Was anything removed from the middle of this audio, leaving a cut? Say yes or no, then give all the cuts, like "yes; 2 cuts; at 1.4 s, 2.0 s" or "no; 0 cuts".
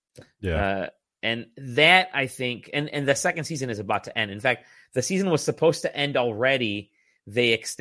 no; 0 cuts